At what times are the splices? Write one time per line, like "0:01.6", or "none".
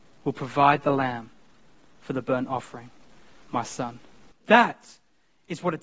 0:04.3

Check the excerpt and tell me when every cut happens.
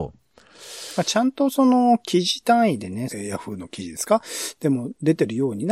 0:03.1

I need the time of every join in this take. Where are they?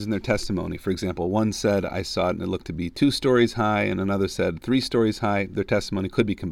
none

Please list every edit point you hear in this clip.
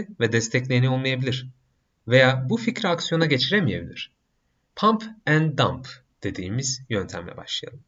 0:04.7

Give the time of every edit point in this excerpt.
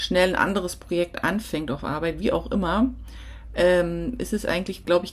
none

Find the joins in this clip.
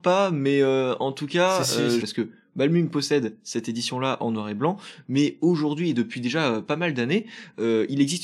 0:02.0

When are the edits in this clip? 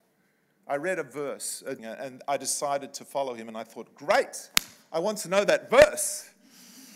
0:01.8

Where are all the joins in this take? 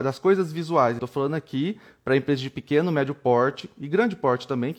0:01.0

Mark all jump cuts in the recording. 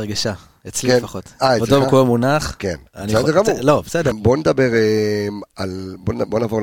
0:04.1

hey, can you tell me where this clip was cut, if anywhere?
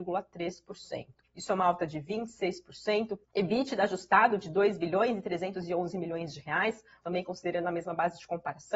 0:01.2
0:03.2
0:07.0

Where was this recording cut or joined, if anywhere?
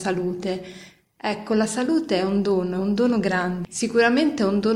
0:03.6

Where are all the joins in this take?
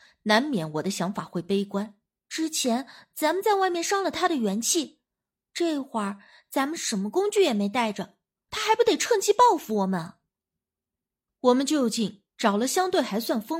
0:02.2
0:08.5
0:11.3

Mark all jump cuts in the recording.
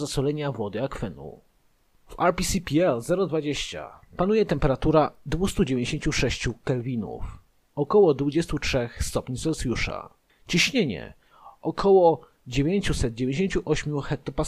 none

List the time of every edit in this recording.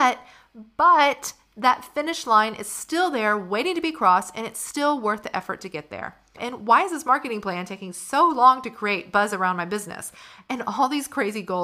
0:06.4

